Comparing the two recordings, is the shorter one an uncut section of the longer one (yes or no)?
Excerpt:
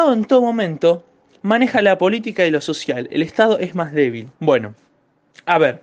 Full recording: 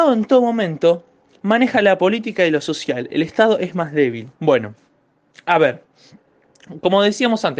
yes